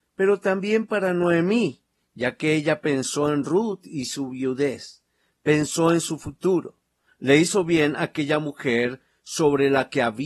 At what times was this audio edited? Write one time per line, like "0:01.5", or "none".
none